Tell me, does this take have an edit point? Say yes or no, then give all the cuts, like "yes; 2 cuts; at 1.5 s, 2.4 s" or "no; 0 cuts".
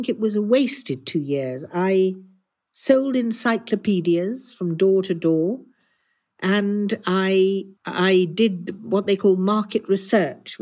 yes; 1 cut; at 7.8 s